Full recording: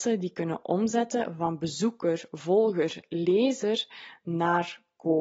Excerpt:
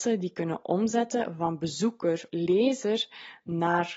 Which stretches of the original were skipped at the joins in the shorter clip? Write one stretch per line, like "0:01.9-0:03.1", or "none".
0:02.3-0:03.1